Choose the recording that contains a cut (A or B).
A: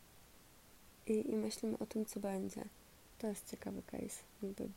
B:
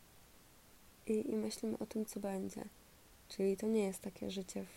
A